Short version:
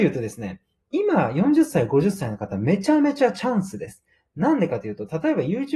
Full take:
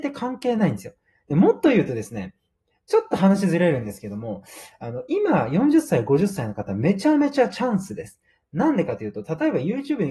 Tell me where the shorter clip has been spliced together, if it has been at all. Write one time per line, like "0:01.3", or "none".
0:00.9

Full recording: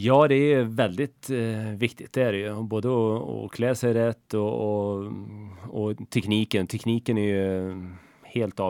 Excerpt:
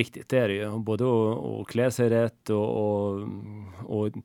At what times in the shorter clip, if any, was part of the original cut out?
none

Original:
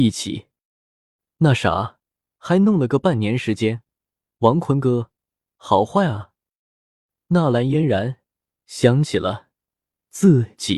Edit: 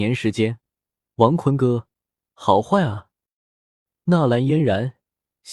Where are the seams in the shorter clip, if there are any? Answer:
none

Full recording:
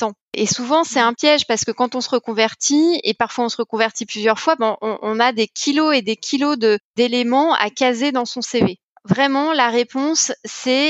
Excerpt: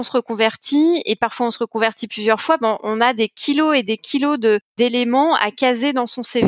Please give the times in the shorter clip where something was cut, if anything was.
0:02.8

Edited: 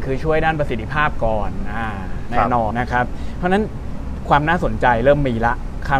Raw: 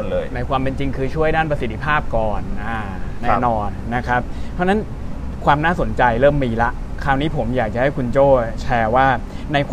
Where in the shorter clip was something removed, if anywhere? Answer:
0:02.7

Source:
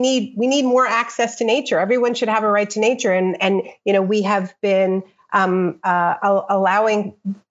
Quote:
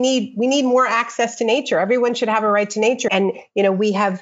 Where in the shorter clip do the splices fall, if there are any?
0:03.1

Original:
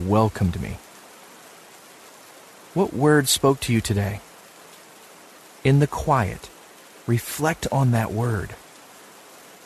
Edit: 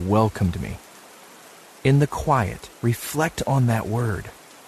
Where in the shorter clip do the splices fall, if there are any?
0:01.7
0:02.8

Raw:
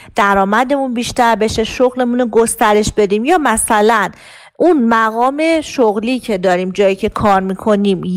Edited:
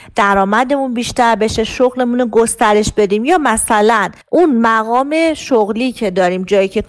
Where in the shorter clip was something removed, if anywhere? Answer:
0:04.2

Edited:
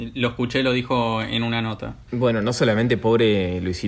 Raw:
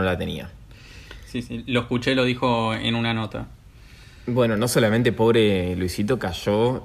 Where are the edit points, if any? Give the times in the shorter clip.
0:02.1

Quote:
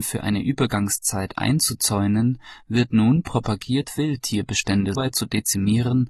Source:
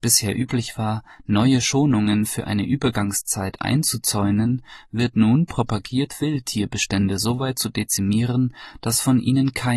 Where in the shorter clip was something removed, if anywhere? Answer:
0:04.9

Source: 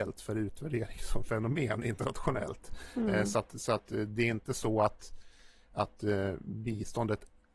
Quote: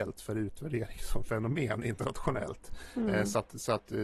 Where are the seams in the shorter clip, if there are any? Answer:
none

